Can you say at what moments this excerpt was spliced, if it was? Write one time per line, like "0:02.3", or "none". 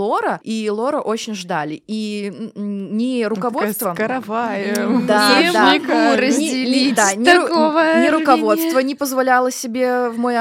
none